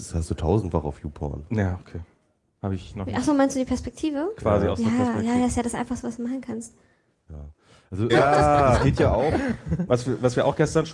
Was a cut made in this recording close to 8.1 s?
yes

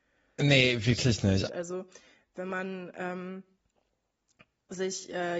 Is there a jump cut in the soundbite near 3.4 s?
no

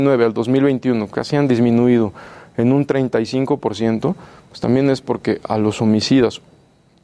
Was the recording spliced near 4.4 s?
no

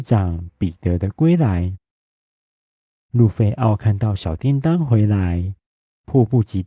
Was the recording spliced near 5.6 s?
no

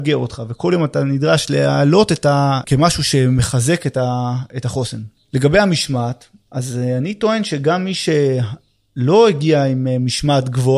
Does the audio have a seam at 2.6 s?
yes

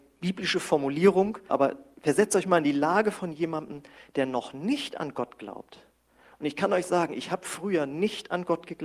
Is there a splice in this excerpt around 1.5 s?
yes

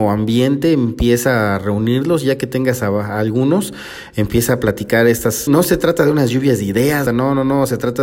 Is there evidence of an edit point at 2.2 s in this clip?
no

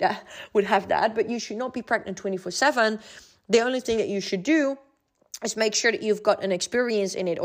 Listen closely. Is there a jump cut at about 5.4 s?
no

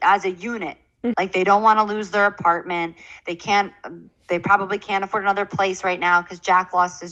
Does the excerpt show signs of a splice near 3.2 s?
no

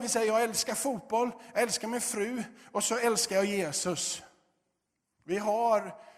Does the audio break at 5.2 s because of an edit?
yes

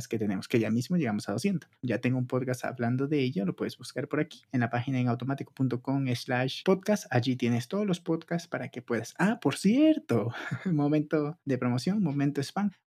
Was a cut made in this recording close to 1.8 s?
yes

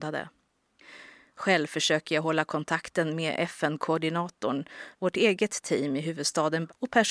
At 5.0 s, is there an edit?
yes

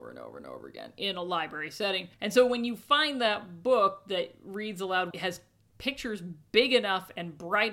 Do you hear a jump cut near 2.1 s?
yes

